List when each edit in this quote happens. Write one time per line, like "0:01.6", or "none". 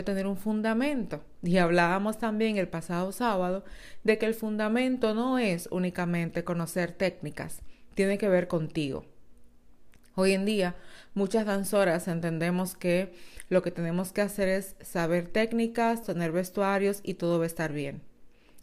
0:16.0